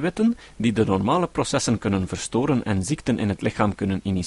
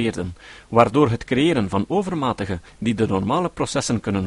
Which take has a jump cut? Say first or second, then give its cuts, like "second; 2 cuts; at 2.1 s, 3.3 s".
second; 1 cut; at 2.7 s